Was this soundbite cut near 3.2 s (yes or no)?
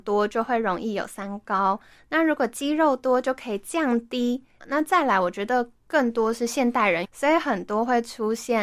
no